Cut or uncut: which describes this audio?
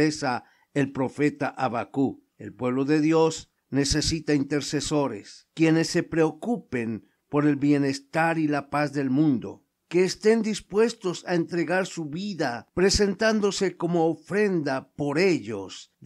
cut